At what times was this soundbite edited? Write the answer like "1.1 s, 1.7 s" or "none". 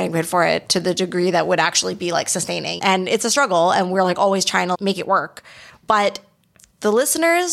none

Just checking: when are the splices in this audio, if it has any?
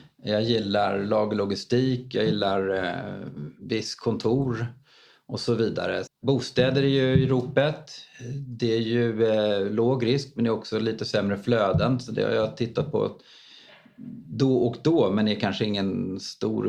6.1 s

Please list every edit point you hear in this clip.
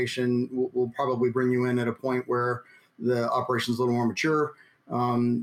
none

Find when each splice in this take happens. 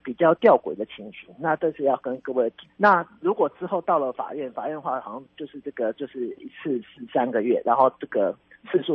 2.7 s

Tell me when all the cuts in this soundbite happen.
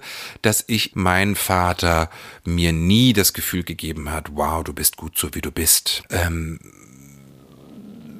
0.9 s, 6.0 s

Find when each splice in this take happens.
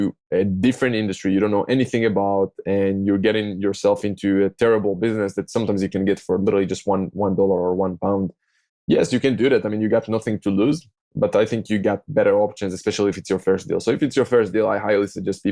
none

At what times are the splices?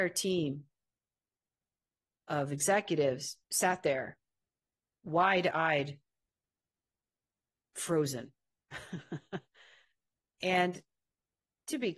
3.4 s

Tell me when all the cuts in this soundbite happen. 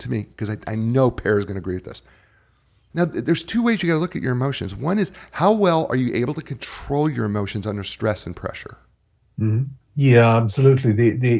2.9 s, 9.8 s

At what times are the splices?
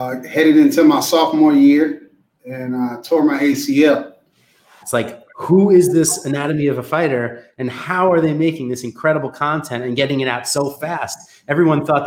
4.8 s

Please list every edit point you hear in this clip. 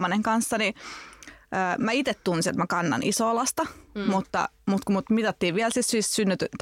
none

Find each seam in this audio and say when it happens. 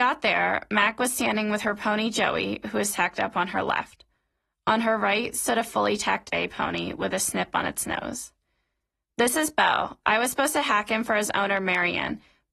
none

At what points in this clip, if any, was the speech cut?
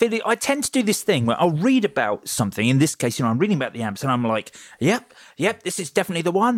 none

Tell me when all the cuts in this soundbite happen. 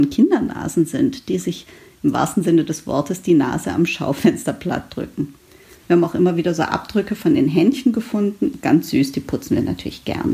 none

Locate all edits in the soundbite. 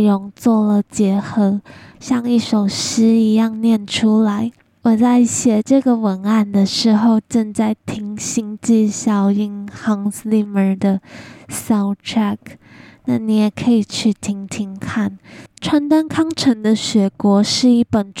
15.5 s

